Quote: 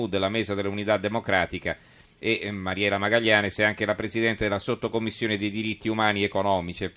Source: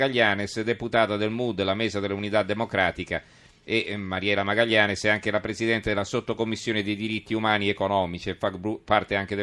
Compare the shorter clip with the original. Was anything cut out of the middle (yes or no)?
no